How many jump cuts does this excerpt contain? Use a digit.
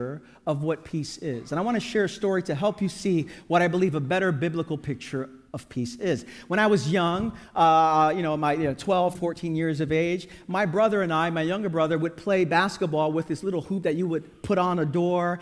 1